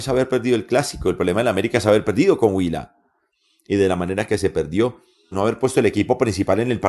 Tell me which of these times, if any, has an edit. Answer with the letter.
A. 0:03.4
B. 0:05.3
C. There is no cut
B